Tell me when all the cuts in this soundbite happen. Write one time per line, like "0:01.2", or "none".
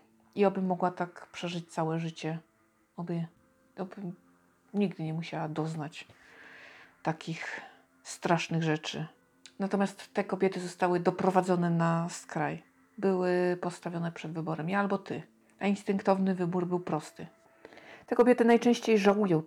none